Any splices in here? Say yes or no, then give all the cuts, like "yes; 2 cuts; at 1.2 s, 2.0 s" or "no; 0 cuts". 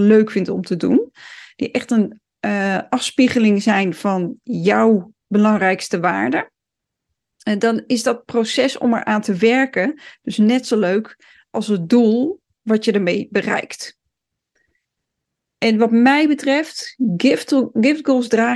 no; 0 cuts